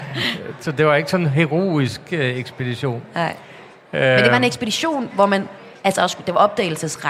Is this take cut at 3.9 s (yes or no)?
no